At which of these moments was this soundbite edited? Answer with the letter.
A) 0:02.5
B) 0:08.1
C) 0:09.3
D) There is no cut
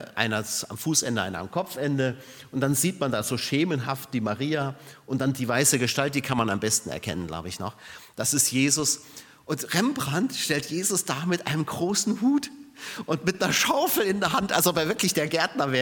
D